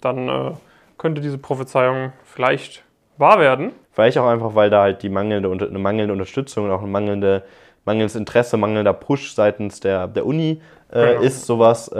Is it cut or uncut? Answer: cut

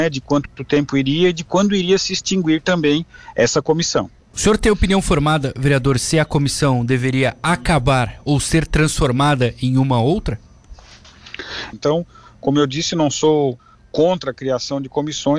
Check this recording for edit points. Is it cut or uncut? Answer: cut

